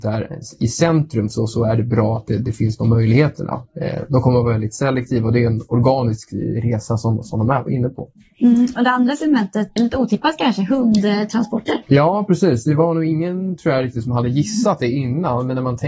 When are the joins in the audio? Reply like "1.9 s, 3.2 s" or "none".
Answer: 9.8 s